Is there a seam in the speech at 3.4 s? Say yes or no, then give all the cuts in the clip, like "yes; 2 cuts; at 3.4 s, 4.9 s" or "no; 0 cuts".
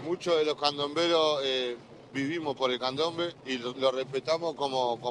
yes; 1 cut; at 3.4 s